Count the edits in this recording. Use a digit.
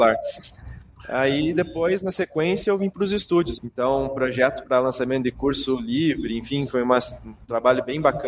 2